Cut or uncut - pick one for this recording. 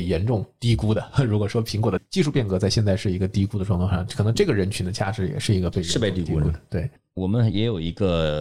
uncut